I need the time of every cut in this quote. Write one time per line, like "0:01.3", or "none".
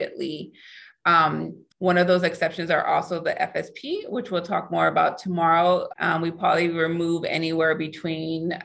0:01.7
0:05.9